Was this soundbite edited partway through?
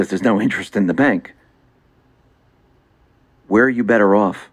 no; 0 cuts

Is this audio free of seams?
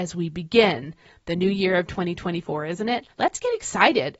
no; 1 cut; at 3.1 s

